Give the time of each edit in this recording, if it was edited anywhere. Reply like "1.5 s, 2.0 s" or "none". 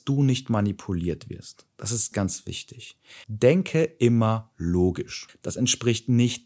2.1 s, 3.2 s, 5.3 s